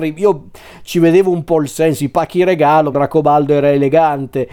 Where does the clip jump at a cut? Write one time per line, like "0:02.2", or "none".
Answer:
0:02.9